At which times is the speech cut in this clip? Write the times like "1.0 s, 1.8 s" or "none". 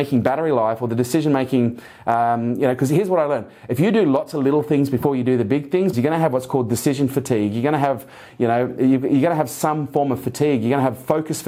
5.9 s